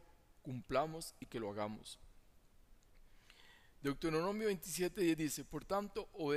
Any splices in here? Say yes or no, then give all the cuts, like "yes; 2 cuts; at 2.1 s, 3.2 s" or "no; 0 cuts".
no; 0 cuts